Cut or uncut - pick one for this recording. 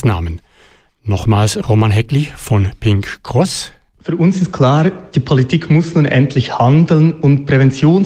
uncut